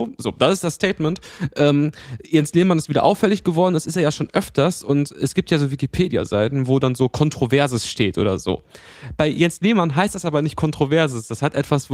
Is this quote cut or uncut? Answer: uncut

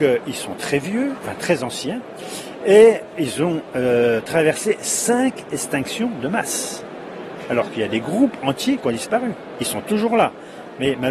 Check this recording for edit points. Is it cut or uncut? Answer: uncut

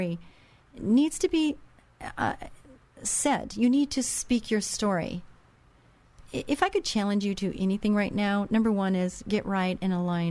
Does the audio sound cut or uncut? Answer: uncut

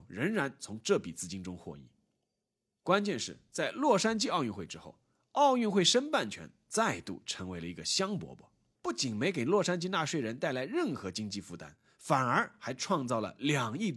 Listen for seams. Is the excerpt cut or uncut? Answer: cut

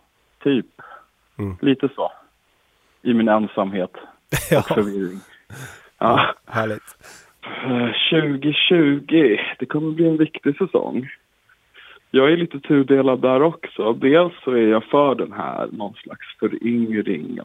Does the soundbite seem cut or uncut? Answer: uncut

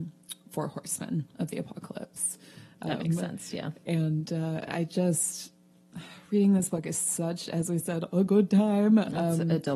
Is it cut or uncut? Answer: uncut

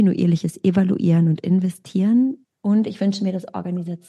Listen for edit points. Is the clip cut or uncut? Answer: cut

